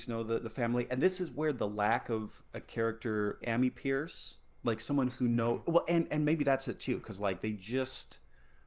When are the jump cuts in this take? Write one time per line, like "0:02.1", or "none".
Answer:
0:03.4